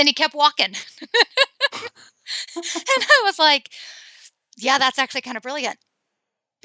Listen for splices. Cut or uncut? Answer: uncut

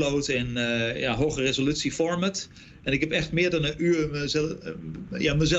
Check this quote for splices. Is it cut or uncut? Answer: uncut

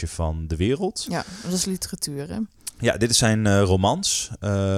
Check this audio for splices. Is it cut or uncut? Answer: uncut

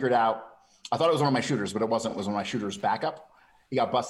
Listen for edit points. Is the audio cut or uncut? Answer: uncut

